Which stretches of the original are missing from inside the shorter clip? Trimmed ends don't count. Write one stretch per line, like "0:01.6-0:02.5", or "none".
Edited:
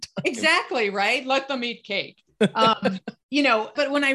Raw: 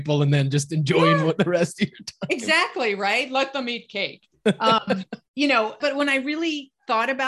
none